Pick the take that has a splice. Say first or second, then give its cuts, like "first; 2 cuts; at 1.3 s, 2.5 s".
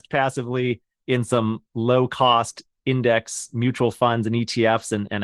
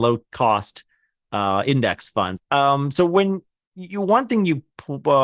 second; 1 cut; at 2.4 s